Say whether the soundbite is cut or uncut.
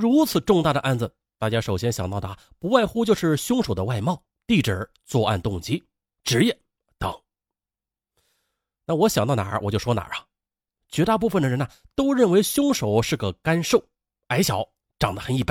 uncut